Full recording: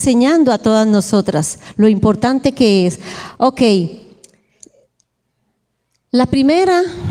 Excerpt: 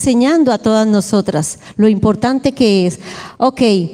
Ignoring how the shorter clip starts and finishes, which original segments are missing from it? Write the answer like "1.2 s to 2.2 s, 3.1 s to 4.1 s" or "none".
none